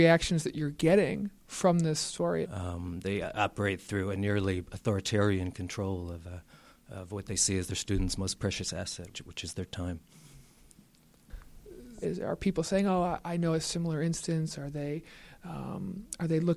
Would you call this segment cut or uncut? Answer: cut